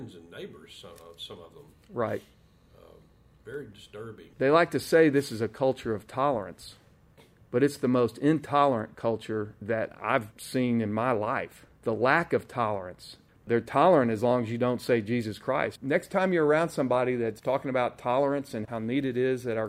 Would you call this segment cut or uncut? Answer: cut